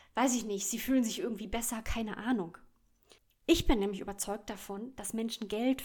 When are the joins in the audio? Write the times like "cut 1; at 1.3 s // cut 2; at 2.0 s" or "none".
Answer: cut 1; at 3.4 s

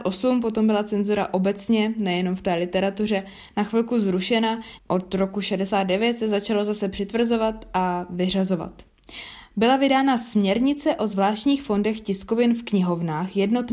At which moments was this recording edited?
cut 1; at 4.8 s

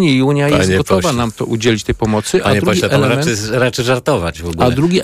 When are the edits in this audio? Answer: none

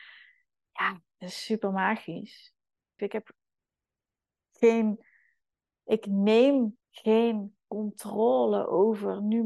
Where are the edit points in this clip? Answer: cut 1; at 3.0 s // cut 2; at 6.8 s

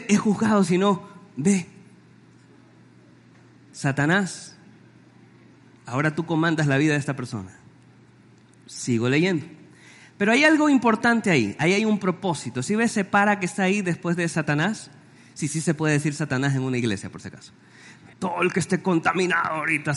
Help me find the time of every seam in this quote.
cut 1; at 18.1 s

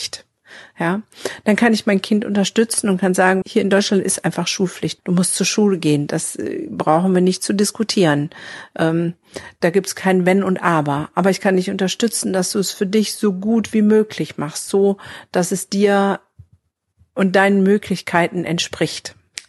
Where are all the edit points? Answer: cut 1; at 3.4 s // cut 2; at 5.0 s

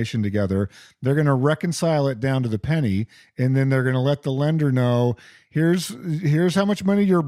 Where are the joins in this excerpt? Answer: none

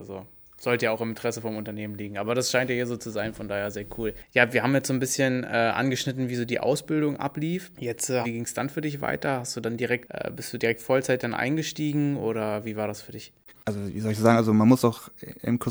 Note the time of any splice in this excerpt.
cut 1; at 8.2 s // cut 2; at 13.5 s

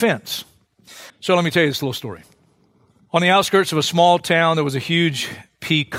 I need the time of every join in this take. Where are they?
cut 1; at 1.1 s

